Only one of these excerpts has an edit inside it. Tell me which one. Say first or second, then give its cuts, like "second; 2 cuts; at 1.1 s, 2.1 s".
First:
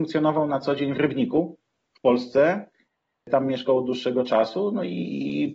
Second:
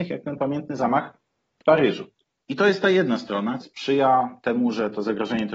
second; 1 cut; at 3.6 s